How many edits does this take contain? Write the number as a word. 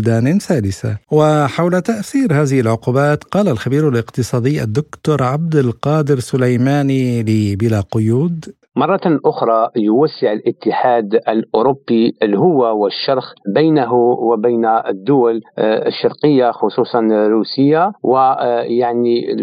one